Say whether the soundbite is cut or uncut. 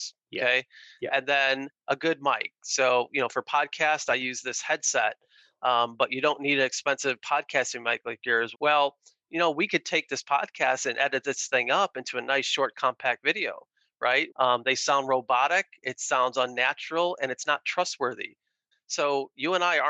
cut